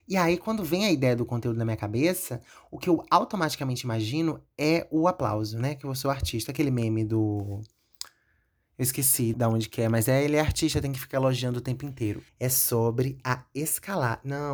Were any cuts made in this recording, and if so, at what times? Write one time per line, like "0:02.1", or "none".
0:09.3
0:12.3